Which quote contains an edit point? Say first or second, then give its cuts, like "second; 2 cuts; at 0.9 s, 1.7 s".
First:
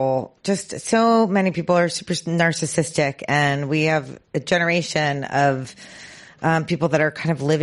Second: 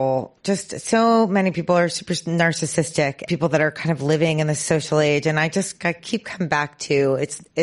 second; 1 cut; at 3.3 s